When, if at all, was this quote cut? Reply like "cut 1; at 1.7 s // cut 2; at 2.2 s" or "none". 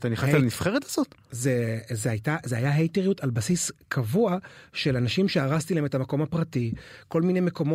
none

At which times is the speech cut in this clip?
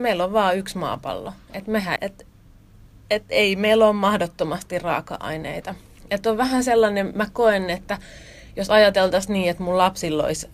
cut 1; at 2.0 s

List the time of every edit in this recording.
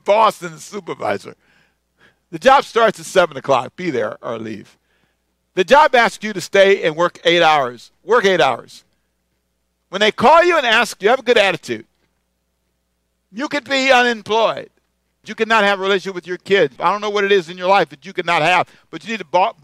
cut 1; at 15.2 s // cut 2; at 16.8 s

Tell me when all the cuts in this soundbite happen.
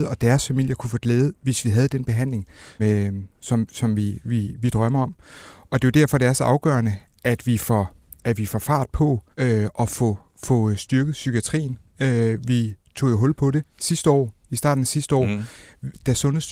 cut 1; at 2.8 s // cut 2; at 9.3 s

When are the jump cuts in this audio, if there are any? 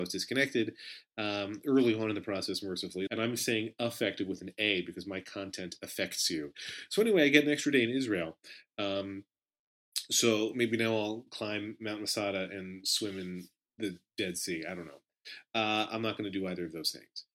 cut 1; at 3.1 s

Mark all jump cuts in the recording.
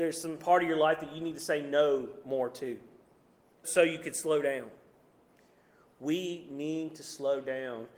cut 1; at 3.6 s

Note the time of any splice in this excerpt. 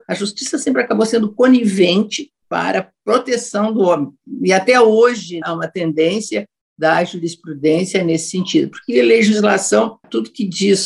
cut 1; at 5.4 s

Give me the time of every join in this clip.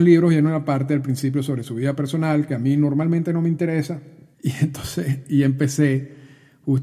cut 1; at 4.3 s

